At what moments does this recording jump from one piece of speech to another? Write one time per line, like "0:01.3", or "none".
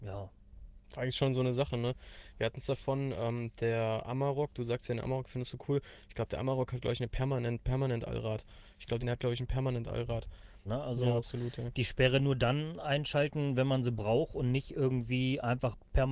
0:09.0
0:10.6